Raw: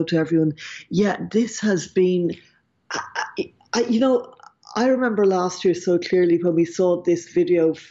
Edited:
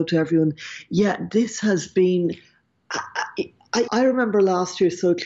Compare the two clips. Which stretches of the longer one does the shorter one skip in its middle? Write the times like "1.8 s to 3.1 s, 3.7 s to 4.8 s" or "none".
3.9 s to 4.7 s